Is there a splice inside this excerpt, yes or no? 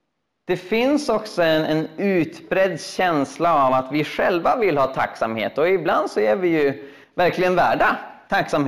no